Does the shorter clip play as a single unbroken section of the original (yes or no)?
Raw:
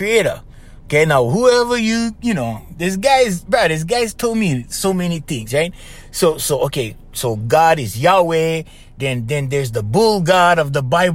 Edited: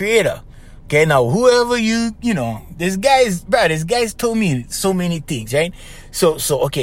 yes